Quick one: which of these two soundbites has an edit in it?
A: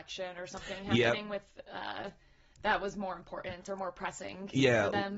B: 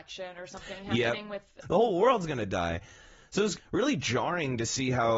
B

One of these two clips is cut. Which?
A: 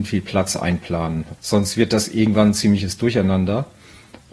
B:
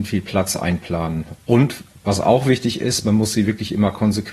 A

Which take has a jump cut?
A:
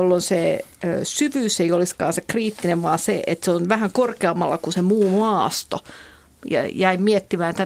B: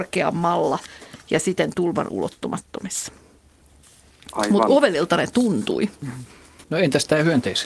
B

